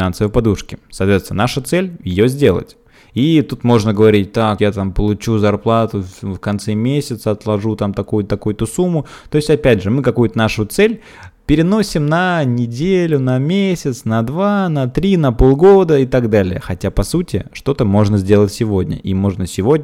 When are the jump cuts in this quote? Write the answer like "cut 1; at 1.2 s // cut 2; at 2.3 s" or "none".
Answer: cut 1; at 4.6 s

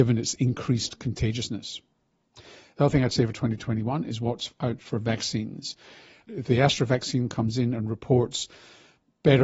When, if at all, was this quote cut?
none

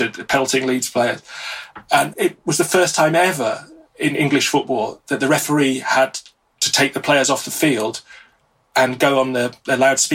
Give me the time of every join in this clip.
cut 1; at 2.1 s

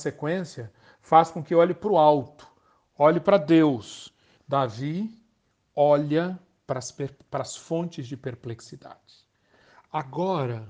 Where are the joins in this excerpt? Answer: cut 1; at 4.4 s

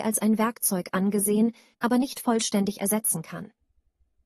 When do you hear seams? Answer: cut 1; at 1.7 s

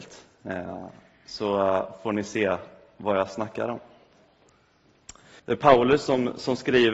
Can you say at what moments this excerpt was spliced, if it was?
cut 1; at 5.4 s

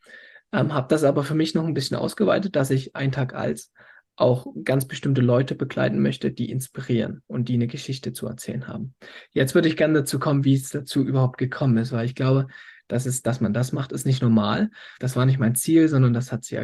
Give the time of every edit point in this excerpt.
cut 1; at 15.0 s

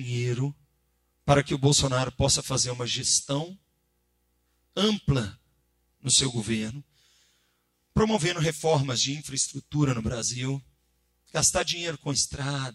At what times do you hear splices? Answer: none

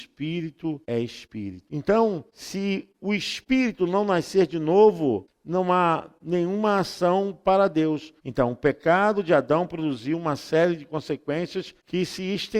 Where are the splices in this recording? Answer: cut 1; at 1.7 s // cut 2; at 8.2 s

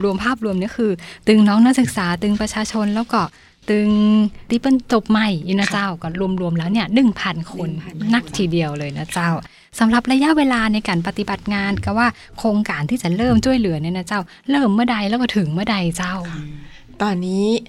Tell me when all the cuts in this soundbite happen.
none

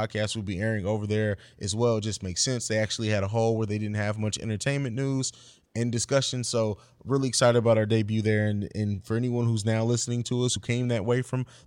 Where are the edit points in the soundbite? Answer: none

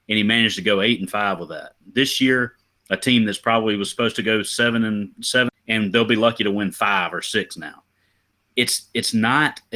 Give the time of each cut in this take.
cut 1; at 5.5 s

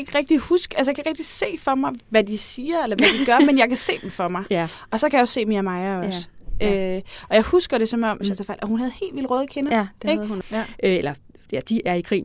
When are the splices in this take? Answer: cut 1; at 8.2 s // cut 2; at 10.4 s

